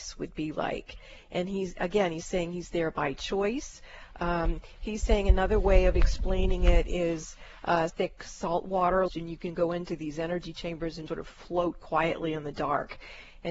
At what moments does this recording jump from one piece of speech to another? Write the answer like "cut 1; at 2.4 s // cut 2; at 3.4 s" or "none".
cut 1; at 7.9 s // cut 2; at 9.1 s // cut 3; at 11.1 s